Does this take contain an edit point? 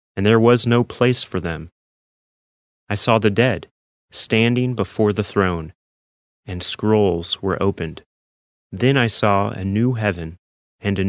yes; 2 cuts; at 3.9 s, 8.5 s

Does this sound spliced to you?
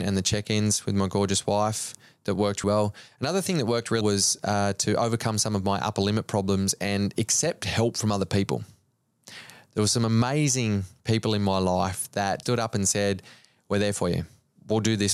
yes; 3 cuts; at 2.6 s, 4.0 s, 12.4 s

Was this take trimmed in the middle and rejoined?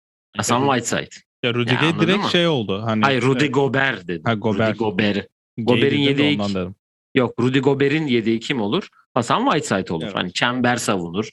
yes; 1 cut; at 1.3 s

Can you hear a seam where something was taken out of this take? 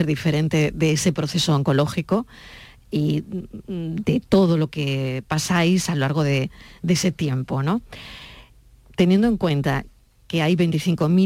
no; 0 cuts

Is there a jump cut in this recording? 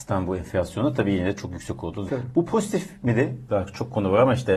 yes; 2 cuts; at 2.1 s, 3.5 s

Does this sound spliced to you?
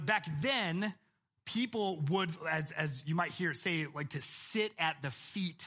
no; 0 cuts

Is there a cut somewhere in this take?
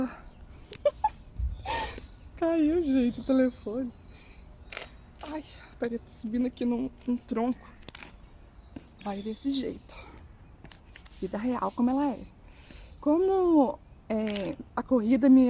no; 0 cuts

